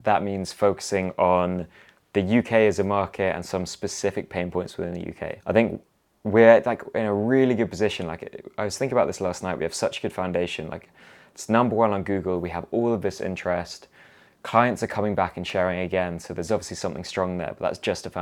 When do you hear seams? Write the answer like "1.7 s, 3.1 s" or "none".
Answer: 5.4 s